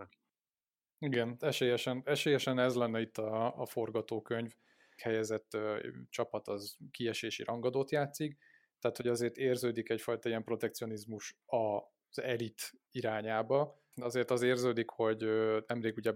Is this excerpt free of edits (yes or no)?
no